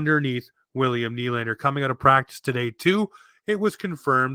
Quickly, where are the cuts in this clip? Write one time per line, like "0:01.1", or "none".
none